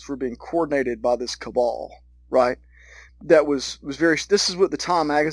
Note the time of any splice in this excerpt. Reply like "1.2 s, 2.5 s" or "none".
3.1 s